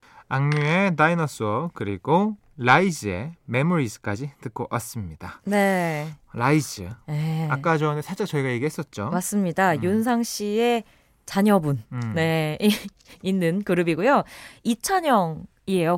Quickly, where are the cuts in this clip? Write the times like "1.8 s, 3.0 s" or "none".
none